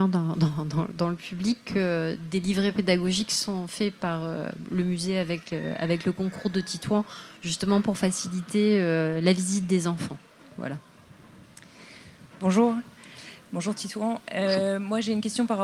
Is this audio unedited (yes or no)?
yes